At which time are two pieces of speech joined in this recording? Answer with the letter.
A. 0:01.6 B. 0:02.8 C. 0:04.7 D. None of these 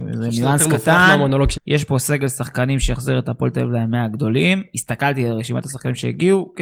A